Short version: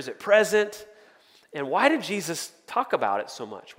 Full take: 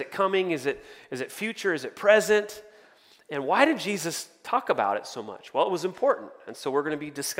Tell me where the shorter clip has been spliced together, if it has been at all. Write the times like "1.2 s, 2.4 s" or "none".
none